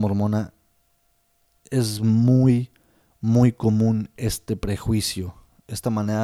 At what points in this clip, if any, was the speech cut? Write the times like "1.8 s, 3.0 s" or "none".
none

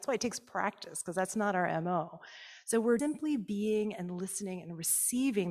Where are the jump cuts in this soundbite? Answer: 3.0 s

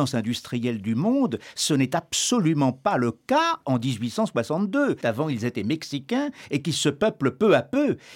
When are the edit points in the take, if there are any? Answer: 5.0 s

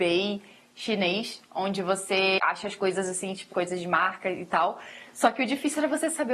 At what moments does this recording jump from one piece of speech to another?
3.5 s

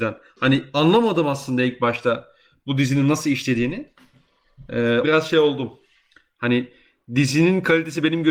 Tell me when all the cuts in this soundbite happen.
5.0 s

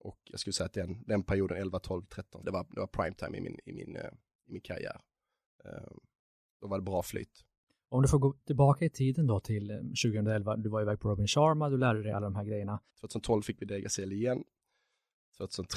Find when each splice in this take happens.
2.4 s, 12.9 s

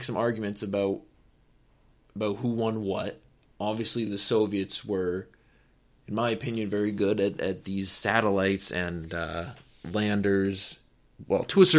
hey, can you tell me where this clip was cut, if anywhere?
none

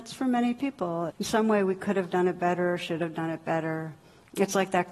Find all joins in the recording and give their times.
1.1 s

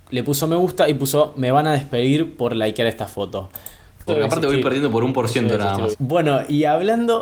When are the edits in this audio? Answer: 4.1 s, 5.9 s

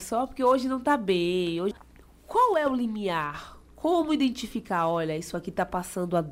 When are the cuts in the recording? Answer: none

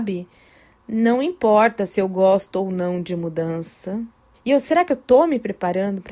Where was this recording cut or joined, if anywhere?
4.3 s

